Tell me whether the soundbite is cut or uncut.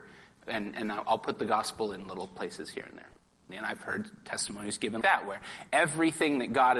cut